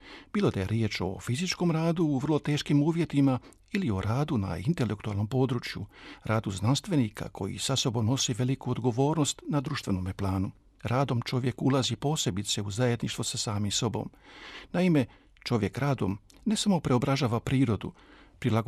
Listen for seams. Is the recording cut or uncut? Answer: uncut